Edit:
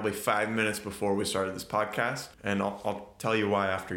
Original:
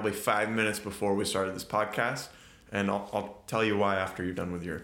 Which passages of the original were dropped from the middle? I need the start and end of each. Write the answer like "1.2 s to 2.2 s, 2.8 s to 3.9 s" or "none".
2.3 s to 2.6 s